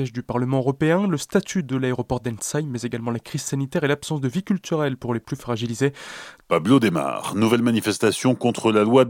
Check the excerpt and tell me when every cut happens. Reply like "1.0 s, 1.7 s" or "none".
6.4 s